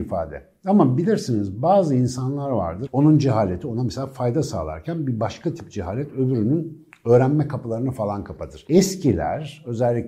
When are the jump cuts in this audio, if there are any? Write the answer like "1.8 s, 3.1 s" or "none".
2.9 s